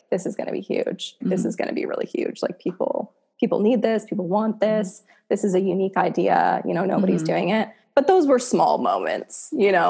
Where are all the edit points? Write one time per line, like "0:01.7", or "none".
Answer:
0:01.2